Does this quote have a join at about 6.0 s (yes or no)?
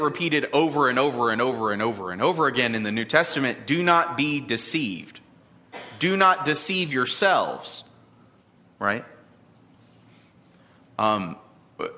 no